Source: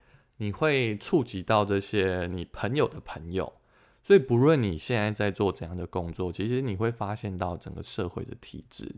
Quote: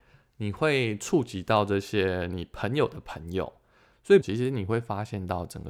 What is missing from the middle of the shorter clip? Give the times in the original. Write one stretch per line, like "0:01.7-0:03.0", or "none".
0:04.2-0:06.3